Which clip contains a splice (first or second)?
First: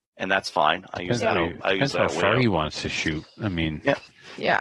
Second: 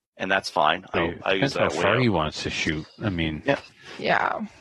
second